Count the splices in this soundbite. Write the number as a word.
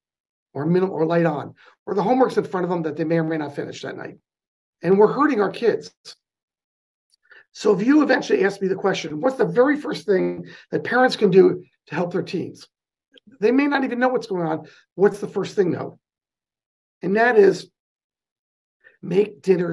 two